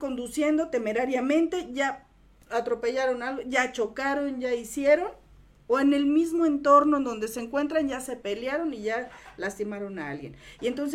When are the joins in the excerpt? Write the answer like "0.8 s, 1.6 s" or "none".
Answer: none